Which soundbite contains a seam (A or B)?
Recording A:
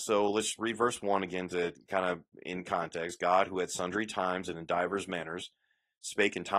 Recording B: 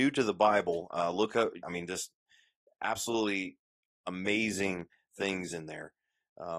B